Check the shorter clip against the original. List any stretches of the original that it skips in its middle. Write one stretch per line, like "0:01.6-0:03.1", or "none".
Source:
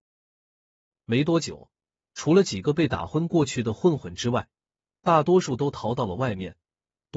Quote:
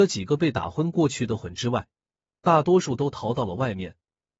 0:03.8-0:04.0